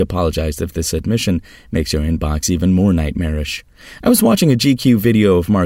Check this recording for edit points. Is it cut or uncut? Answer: uncut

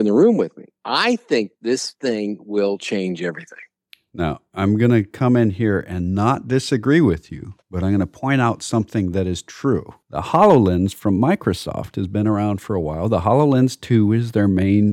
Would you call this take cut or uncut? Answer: uncut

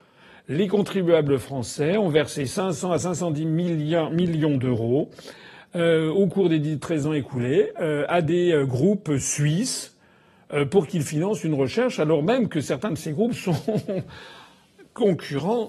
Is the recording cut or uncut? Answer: uncut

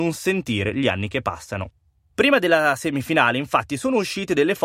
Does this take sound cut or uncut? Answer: cut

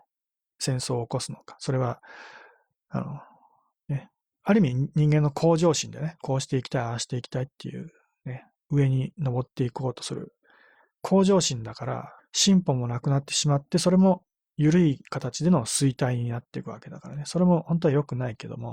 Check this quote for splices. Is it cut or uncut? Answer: cut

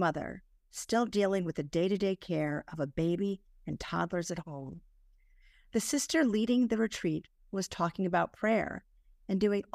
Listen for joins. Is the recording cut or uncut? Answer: uncut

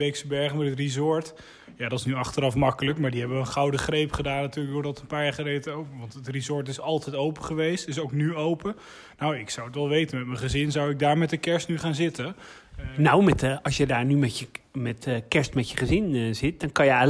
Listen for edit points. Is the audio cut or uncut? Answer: uncut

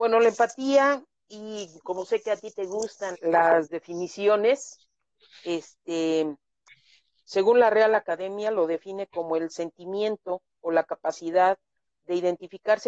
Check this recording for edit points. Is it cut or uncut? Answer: cut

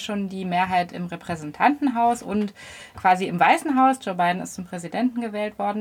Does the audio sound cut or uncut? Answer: uncut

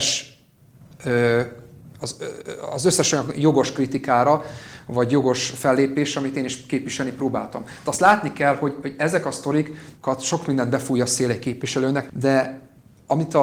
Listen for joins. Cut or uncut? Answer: cut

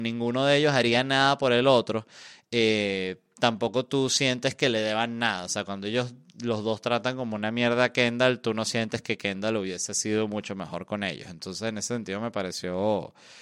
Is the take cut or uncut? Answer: uncut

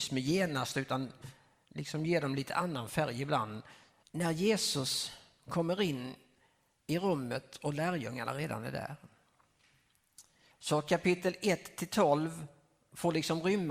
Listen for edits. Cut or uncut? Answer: cut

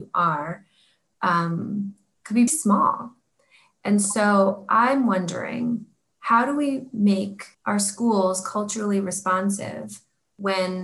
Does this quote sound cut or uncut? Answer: cut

